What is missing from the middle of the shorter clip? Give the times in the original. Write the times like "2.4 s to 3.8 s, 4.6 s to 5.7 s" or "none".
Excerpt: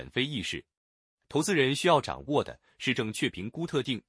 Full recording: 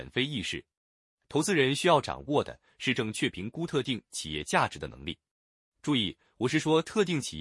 none